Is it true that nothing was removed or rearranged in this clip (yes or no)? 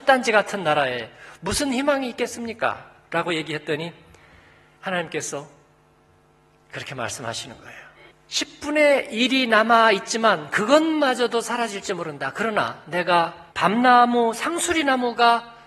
no